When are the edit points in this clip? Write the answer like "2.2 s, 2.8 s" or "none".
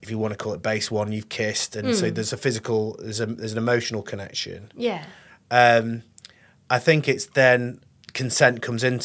none